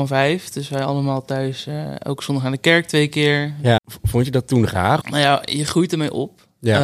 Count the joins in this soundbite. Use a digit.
2